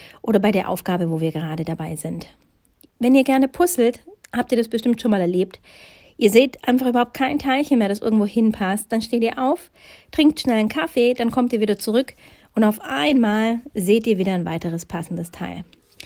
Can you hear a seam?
no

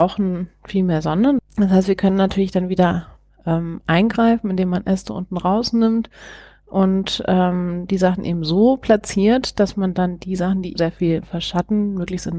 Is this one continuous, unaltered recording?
no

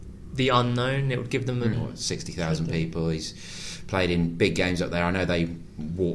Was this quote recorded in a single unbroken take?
no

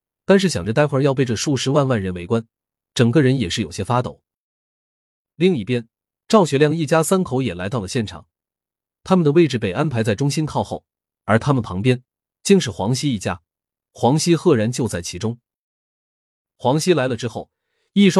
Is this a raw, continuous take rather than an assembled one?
yes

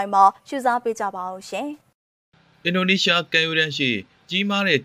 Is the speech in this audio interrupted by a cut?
yes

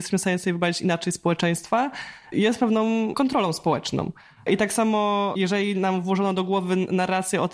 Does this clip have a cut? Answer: no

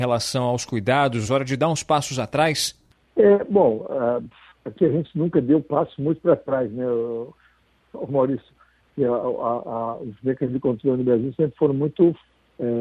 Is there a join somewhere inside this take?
yes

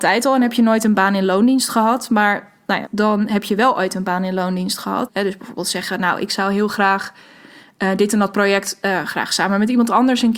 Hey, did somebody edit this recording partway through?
yes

